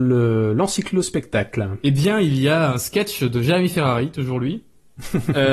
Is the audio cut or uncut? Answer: uncut